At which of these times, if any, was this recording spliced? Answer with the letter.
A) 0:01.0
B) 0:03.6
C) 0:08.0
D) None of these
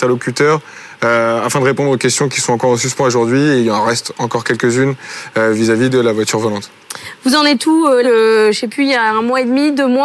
C